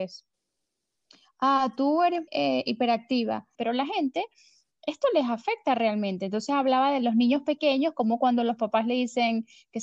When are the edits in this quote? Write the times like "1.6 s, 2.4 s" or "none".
2.3 s, 3.5 s